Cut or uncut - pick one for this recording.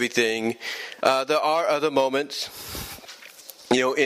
cut